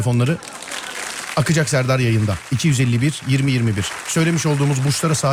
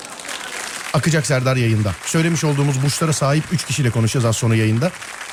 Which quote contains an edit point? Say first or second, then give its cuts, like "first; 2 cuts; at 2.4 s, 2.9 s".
second; 1 cut; at 2.0 s